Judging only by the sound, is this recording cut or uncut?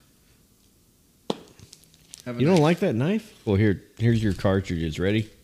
cut